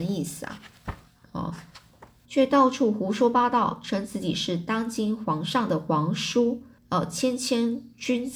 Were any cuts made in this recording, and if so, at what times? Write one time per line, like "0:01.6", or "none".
0:02.2
0:06.8